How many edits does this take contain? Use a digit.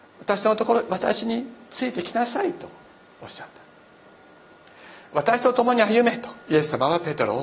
1